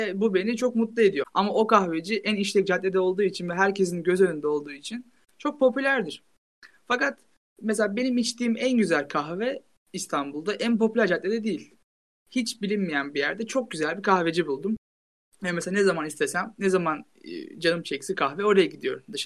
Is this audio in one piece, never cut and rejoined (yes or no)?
no